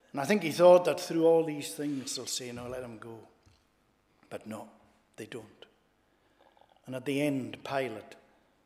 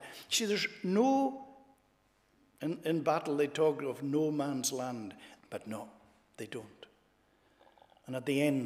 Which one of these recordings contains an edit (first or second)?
second